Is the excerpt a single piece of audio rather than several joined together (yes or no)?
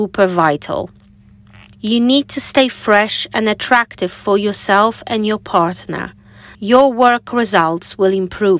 no